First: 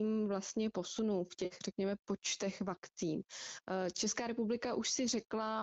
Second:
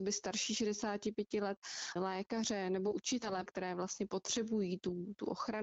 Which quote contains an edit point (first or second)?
second